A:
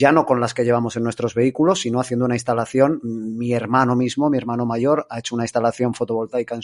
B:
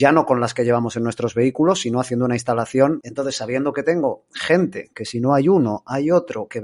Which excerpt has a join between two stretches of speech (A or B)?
B